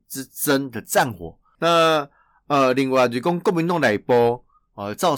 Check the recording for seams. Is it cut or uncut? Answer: cut